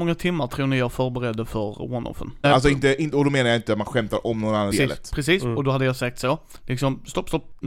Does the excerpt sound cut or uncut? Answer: cut